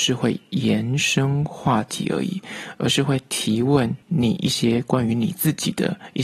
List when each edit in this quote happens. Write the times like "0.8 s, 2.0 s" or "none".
4.0 s